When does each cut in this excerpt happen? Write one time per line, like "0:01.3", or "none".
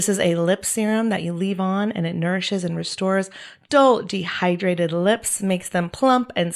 none